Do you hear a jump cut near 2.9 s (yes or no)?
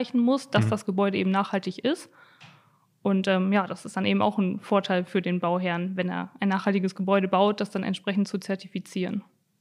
no